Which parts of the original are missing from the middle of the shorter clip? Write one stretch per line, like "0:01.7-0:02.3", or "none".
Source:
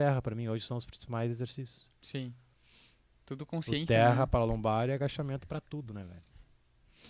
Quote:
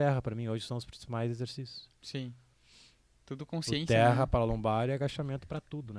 none